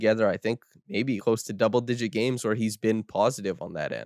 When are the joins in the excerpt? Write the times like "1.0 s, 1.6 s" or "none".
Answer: 1.2 s

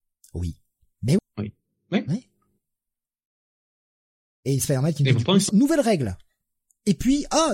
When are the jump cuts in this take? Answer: 1.2 s, 5.5 s

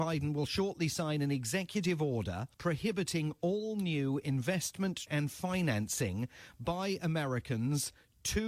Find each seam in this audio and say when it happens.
2.5 s, 5.1 s

